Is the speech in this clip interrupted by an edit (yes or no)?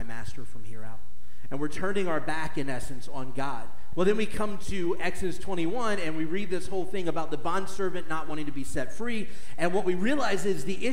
yes